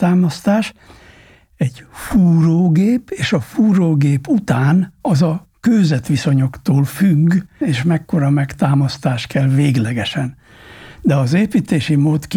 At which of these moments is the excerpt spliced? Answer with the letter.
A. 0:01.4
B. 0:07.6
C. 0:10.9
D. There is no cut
B